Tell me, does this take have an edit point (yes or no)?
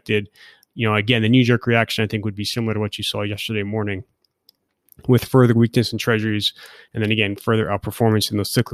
no